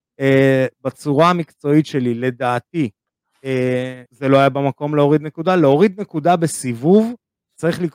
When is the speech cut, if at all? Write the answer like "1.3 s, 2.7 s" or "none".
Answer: 4.1 s